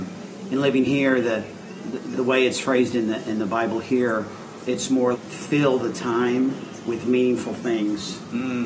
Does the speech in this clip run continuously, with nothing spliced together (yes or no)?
no